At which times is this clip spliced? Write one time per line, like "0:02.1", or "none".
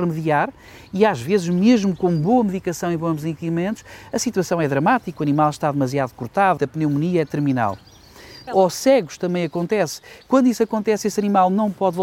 0:06.6
0:08.5

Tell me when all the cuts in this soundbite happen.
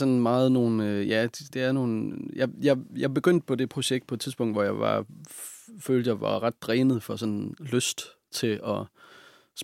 0:01.5

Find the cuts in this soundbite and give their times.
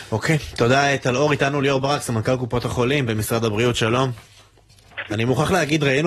0:05.1

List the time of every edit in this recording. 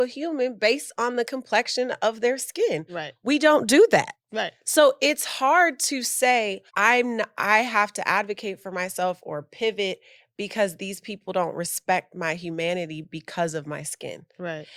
0:04.2
0:06.7

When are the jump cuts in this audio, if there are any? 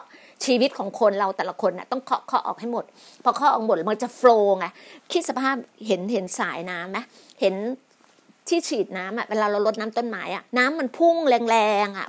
0:10.5

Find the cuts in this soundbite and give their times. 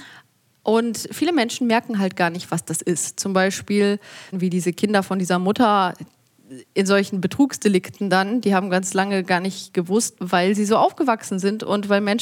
0:04.3
0:10.2

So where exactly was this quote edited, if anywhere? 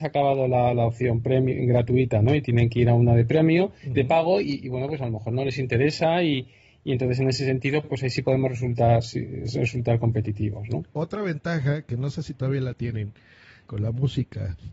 0:10.9
0:13.6

